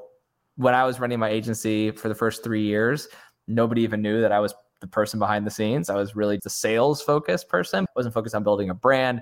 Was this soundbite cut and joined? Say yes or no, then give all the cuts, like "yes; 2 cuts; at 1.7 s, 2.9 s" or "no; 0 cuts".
yes; 2 cuts; at 6.4 s, 7.9 s